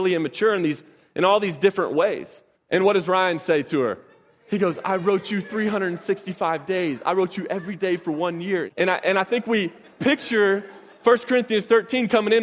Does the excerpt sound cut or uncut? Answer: cut